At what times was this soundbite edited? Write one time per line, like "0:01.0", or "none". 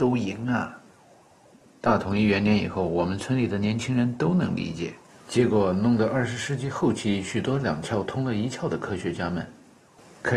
0:05.1